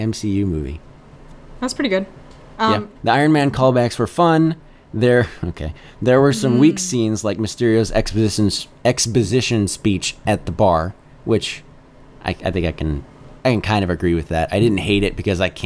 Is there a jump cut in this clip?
yes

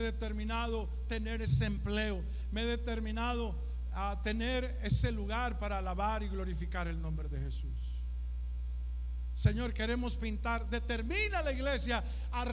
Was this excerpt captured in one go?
yes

